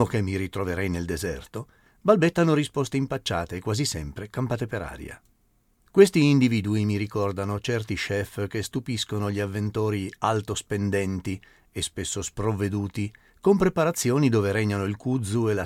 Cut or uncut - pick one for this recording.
uncut